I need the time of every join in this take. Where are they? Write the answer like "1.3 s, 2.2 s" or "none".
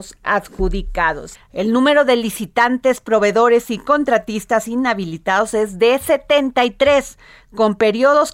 1.3 s